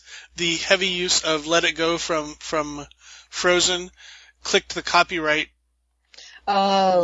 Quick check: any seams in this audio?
no; 0 cuts

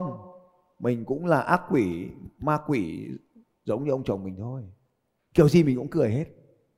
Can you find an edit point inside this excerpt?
yes; 1 cut; at 5.2 s

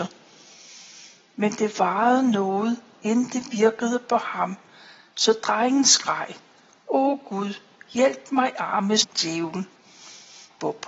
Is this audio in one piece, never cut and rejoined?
yes; 0 cuts

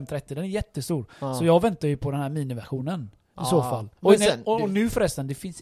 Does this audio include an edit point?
yes; 1 cut; at 4.0 s

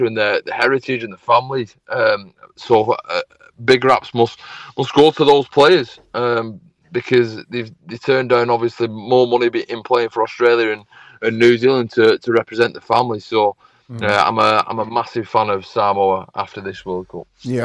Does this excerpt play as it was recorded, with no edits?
yes; 0 cuts

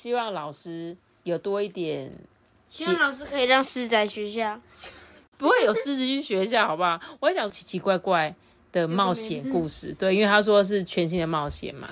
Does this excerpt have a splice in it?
yes; 1 cut; at 7.5 s

